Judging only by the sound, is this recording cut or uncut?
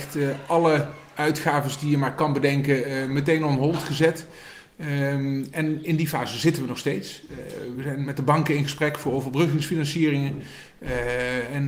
cut